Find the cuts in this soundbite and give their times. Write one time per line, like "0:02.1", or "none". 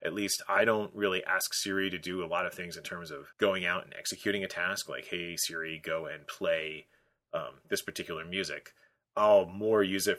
0:03.3